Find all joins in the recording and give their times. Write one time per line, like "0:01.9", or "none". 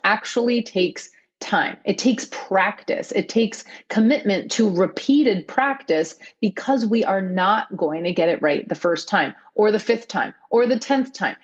none